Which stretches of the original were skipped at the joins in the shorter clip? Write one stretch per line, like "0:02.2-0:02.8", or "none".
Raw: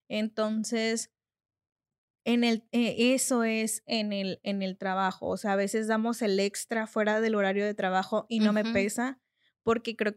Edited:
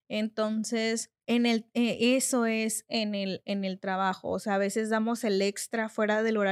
0:01.2-0:02.2